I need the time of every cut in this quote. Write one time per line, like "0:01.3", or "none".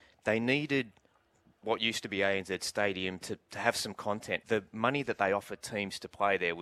0:04.4